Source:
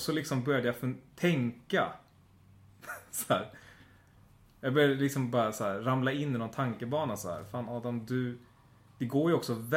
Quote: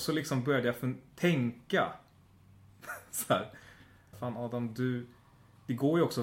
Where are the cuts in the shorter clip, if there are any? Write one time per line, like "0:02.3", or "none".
0:04.1